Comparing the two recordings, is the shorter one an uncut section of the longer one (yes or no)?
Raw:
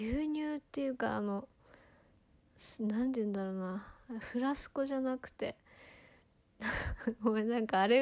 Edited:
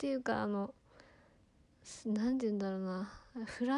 yes